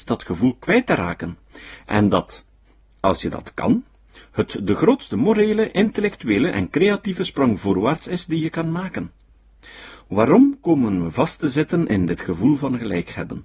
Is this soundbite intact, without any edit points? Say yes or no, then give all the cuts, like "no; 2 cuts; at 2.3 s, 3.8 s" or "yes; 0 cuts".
yes; 0 cuts